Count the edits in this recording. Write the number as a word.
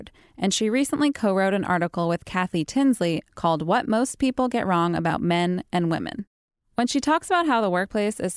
one